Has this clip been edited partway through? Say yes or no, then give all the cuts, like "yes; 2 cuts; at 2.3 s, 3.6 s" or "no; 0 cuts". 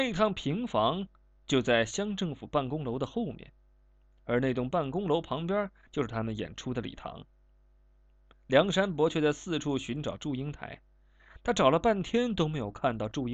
no; 0 cuts